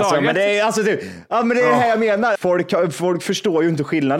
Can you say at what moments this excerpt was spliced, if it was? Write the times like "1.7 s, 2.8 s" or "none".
2.4 s

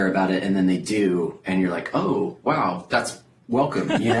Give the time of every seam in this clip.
none

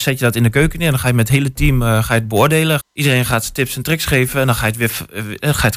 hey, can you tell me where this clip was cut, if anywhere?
2.8 s

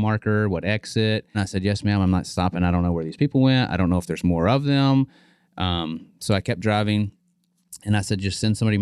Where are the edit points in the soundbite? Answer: 1.3 s

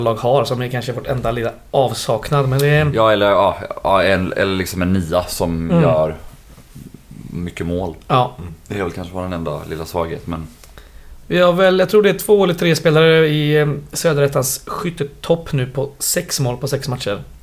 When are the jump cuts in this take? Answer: none

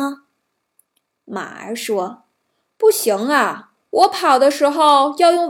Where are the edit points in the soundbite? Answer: none

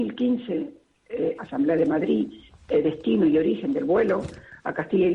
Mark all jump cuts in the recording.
1.4 s

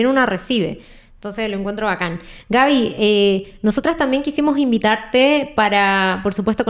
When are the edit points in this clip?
none

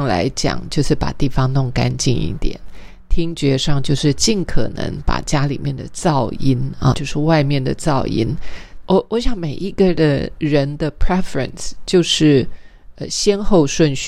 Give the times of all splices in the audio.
8.8 s

